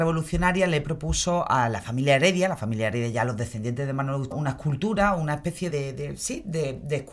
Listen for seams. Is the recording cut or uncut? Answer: cut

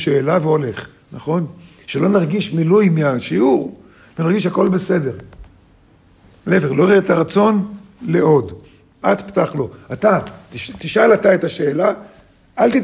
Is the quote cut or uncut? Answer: cut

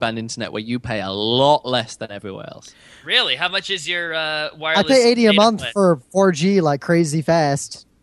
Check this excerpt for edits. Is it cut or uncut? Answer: uncut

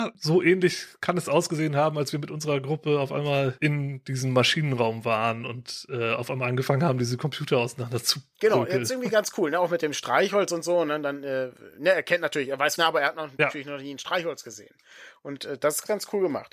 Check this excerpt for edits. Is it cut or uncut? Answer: cut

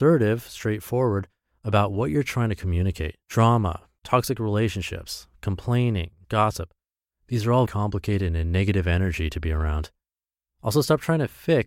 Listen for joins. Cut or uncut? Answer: cut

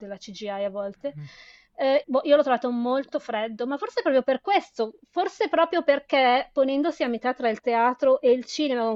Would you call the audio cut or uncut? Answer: cut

